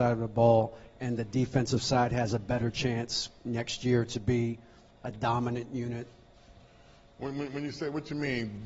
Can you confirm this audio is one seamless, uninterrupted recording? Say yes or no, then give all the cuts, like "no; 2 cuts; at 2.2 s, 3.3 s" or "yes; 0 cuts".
yes; 0 cuts